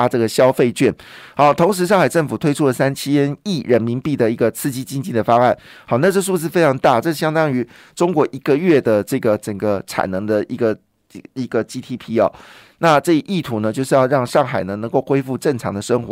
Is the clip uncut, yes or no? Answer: yes